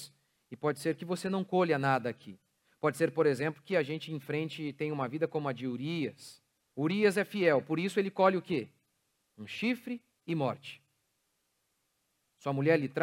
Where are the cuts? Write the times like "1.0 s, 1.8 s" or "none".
6.7 s

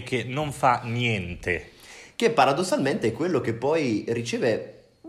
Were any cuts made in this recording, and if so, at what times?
none

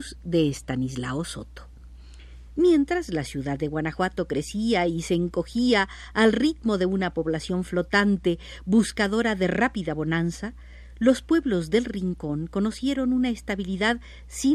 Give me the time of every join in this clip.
2.5 s

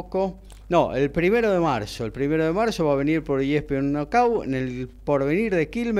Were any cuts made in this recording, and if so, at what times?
none

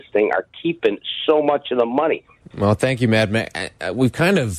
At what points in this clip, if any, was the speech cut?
2.4 s

